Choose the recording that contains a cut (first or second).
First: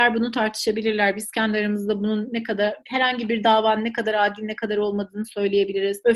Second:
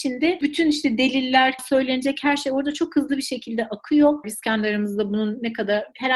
second